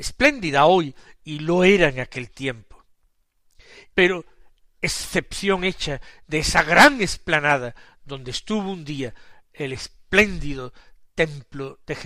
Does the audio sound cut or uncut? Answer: cut